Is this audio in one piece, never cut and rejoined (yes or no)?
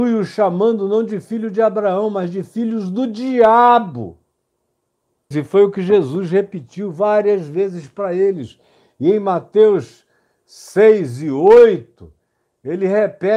no